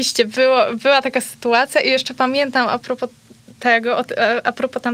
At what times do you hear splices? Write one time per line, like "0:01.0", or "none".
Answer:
none